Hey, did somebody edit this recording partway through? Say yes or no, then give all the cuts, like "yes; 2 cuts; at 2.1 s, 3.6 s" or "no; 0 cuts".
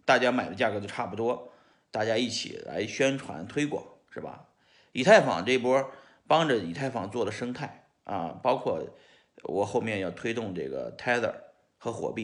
no; 0 cuts